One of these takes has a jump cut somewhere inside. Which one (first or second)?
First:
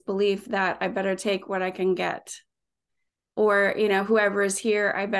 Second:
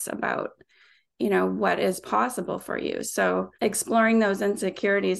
second